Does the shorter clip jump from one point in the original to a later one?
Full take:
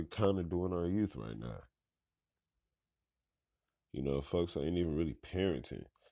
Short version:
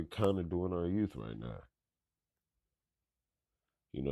no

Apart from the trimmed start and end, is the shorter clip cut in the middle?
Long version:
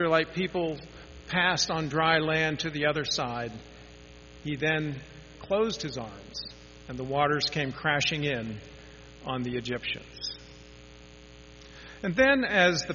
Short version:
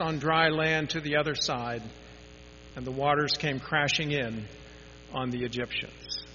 yes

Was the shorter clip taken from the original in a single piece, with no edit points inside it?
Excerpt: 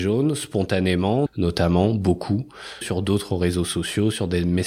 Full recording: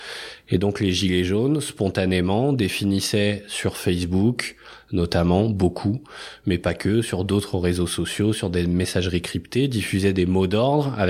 no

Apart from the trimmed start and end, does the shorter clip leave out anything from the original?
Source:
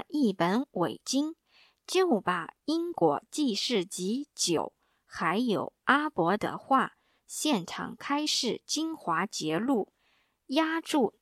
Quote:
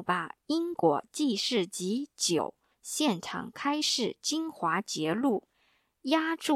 yes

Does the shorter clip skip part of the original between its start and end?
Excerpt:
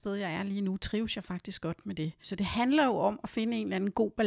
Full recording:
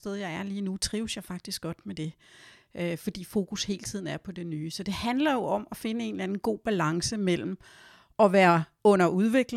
yes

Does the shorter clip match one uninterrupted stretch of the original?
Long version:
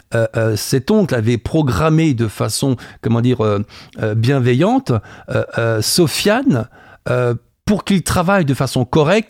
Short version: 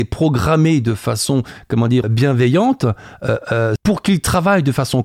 no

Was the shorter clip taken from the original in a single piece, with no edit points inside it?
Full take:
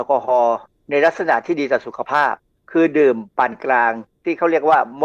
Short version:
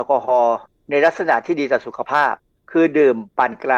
yes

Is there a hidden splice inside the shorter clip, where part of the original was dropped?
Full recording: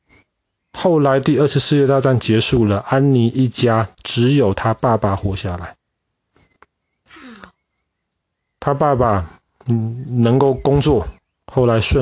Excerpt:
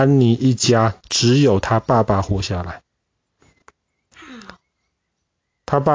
no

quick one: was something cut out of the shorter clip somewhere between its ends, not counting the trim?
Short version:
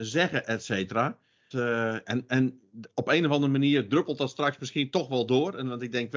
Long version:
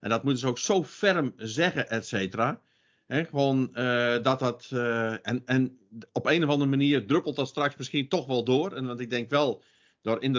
yes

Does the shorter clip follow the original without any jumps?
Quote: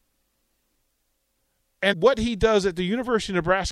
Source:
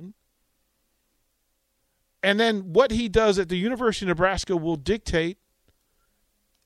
no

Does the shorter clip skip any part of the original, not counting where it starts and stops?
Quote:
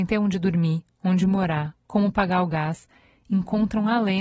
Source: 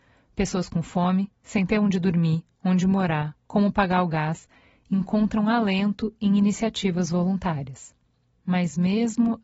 no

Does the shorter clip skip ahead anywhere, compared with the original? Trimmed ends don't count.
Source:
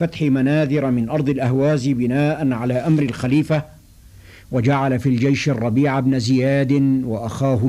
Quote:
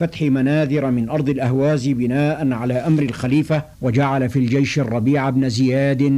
yes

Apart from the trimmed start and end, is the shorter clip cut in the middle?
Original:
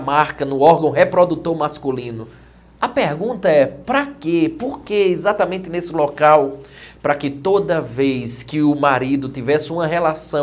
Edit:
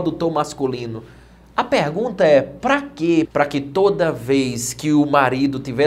yes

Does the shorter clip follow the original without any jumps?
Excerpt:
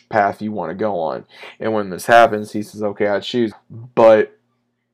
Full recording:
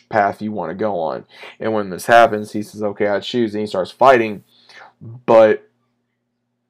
no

